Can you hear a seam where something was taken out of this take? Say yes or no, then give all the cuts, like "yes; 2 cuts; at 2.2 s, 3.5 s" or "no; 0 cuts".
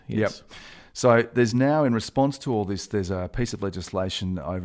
no; 0 cuts